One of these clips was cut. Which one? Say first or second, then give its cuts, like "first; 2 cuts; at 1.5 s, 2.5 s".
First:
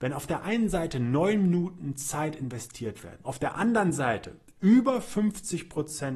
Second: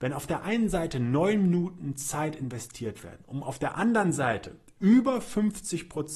first; 1 cut; at 3.2 s